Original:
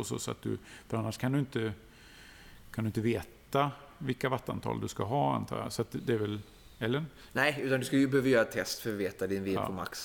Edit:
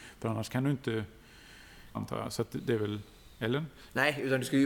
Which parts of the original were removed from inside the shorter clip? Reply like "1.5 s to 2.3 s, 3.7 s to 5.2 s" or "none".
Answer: 2.6 s to 5.3 s